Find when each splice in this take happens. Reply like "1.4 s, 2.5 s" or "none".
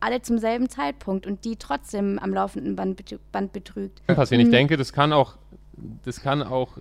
4.1 s